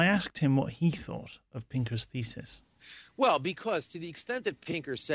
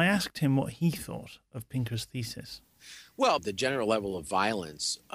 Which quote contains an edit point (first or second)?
second